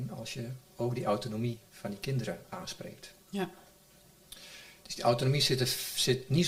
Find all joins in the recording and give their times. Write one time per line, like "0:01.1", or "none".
none